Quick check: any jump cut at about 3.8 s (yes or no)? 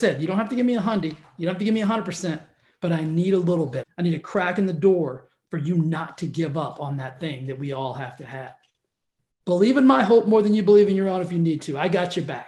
yes